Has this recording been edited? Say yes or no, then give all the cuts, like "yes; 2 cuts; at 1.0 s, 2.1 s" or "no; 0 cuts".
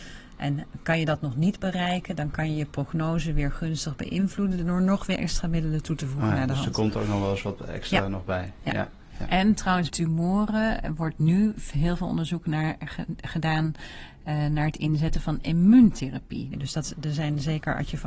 yes; 2 cuts; at 9.9 s, 16.5 s